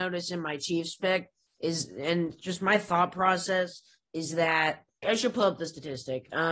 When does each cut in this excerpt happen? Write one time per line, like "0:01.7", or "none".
0:05.0